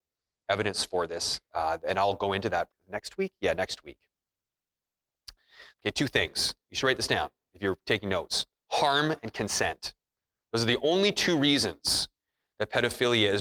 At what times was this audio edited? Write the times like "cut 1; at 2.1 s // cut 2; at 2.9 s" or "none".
cut 1; at 2.7 s // cut 2; at 5.7 s

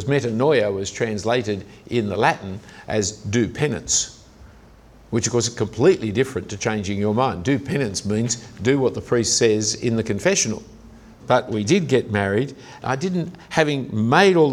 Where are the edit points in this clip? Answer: cut 1; at 11.2 s // cut 2; at 12.8 s

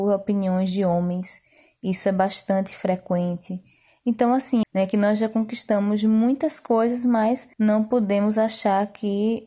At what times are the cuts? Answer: cut 1; at 4.6 s // cut 2; at 7.5 s

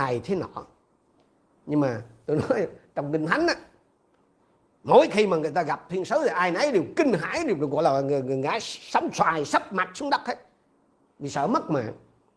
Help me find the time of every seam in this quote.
none

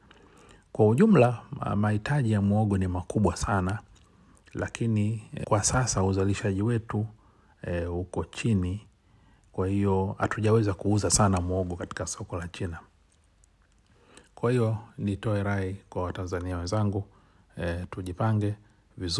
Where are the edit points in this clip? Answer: cut 1; at 5.4 s

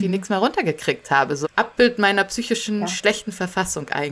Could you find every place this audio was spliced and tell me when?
cut 1; at 1.4 s

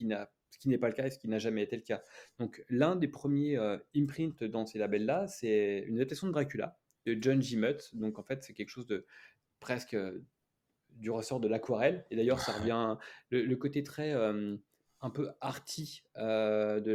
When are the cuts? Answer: none

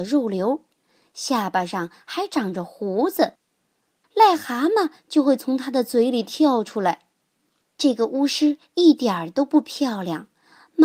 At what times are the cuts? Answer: cut 1; at 4.0 s // cut 2; at 7.6 s

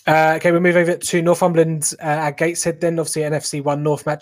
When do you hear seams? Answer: none

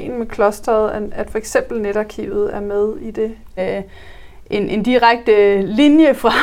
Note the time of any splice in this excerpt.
cut 1; at 3.6 s

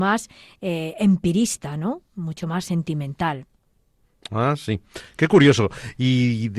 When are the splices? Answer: none

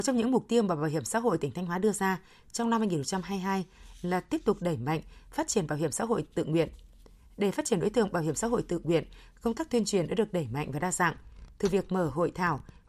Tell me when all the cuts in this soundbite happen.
none

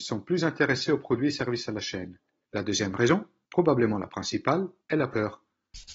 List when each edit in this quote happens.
cut 1; at 2.5 s

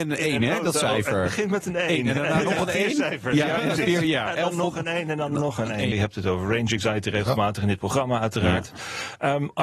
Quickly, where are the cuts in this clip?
cut 1; at 5.9 s

